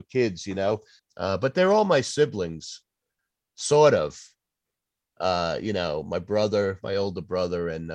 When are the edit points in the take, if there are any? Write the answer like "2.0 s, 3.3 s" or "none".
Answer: 1.0 s